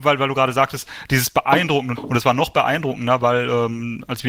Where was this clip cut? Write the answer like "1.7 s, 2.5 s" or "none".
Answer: 1.9 s